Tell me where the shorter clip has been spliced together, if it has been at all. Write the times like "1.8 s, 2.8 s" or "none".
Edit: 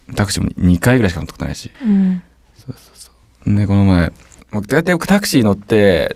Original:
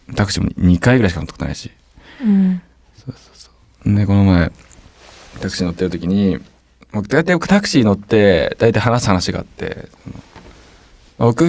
1.7 s, 4.4 s